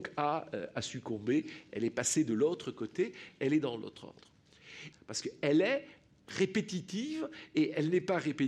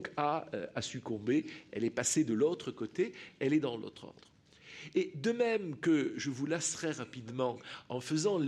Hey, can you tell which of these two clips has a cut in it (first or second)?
first